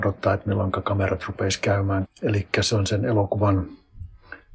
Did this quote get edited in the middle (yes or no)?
yes